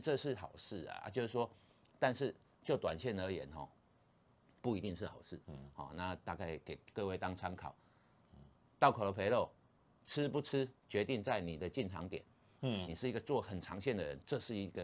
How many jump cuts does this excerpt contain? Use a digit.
2